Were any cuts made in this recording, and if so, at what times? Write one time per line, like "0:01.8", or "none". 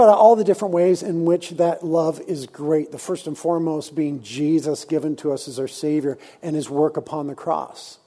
none